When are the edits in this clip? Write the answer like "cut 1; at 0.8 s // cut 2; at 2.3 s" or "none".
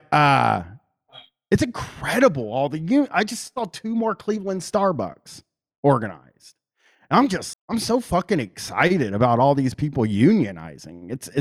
cut 1; at 7.5 s